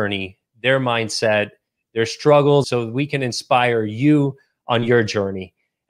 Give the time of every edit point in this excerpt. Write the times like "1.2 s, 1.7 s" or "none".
2.6 s